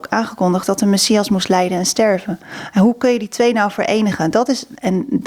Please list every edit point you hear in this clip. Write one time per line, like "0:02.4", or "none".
none